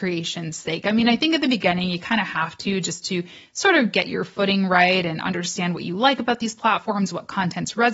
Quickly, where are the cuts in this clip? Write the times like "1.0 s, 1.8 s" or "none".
none